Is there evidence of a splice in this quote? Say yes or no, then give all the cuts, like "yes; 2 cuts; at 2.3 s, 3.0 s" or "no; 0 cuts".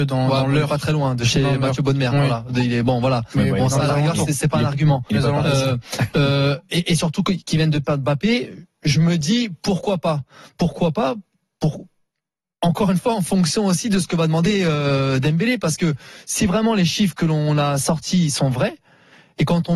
no; 0 cuts